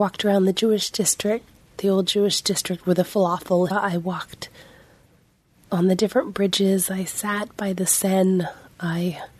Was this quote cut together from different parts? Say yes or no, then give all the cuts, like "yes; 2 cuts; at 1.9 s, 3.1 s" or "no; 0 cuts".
yes; 1 cut; at 3.7 s